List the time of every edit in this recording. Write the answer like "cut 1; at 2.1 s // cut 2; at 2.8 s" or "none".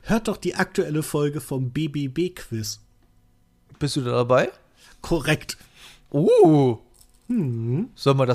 none